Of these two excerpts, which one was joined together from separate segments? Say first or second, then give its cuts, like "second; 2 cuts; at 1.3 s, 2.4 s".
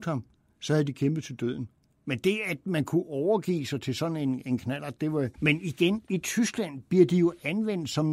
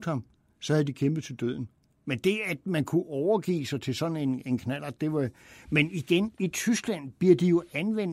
first; 1 cut; at 5.3 s